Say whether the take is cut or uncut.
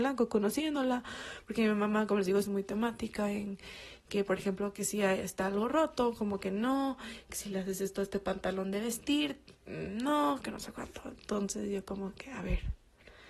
uncut